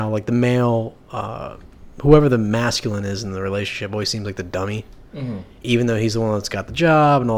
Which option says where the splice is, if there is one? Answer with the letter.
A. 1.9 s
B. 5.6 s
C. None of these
A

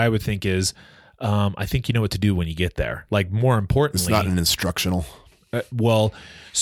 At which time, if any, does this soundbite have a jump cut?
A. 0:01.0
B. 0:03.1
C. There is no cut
B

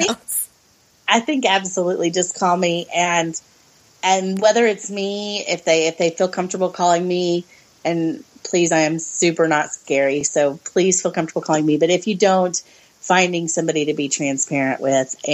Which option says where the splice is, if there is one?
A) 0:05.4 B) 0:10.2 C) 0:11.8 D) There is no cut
D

